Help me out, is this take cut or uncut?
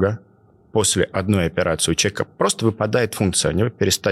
uncut